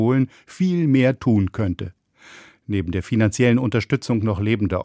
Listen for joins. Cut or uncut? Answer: uncut